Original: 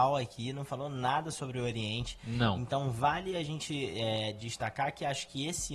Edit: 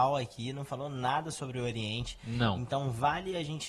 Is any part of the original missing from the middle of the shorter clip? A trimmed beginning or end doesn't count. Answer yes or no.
no